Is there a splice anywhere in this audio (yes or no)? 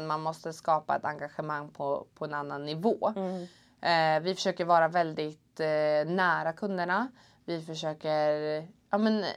no